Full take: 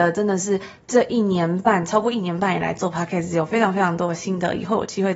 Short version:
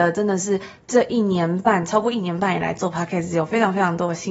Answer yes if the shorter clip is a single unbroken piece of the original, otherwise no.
yes